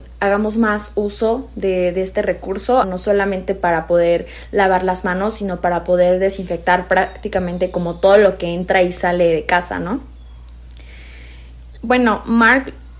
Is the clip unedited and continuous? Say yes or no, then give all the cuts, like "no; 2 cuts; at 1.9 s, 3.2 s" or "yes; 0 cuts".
no; 2 cuts; at 2.8 s, 11.7 s